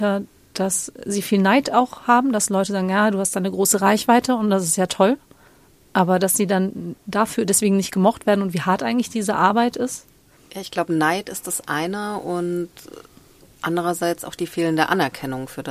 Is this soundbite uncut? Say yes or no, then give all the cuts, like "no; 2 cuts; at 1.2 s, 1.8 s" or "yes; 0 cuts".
yes; 0 cuts